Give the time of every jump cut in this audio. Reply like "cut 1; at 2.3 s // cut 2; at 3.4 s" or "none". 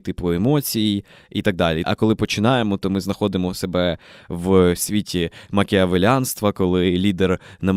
cut 1; at 1.8 s